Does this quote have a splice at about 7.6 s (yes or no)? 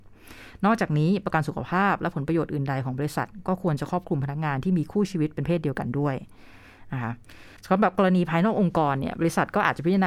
yes